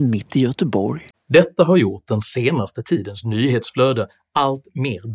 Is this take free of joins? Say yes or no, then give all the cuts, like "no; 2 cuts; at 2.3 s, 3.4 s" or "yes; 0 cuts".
no; 1 cut; at 1.1 s